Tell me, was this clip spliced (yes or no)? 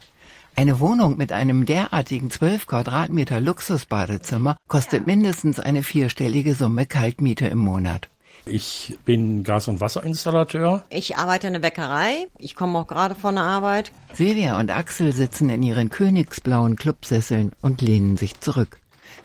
yes